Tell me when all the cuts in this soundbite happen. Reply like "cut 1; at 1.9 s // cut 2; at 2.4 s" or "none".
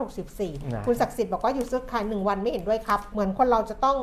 cut 1; at 3.1 s